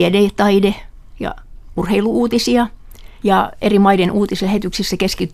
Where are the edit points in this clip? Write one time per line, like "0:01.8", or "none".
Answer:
0:03.2